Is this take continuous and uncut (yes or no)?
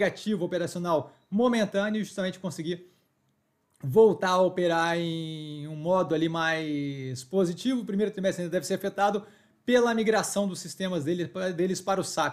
yes